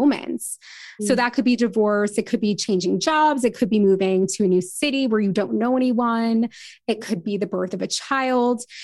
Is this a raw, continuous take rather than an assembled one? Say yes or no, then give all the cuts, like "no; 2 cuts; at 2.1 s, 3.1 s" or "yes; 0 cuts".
no; 1 cut; at 1.0 s